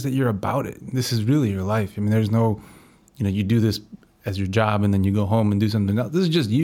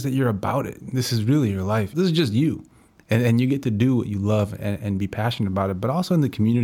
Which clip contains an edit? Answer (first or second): second